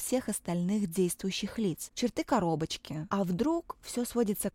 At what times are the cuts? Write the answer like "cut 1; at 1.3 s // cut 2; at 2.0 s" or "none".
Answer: cut 1; at 1.9 s // cut 2; at 3.1 s